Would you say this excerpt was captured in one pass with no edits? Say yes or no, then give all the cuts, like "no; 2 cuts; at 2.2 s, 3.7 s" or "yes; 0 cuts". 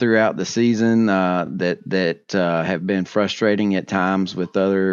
yes; 0 cuts